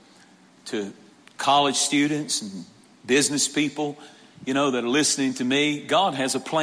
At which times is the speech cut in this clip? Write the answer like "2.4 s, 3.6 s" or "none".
none